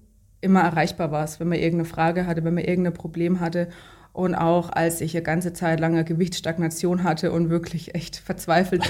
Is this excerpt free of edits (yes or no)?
yes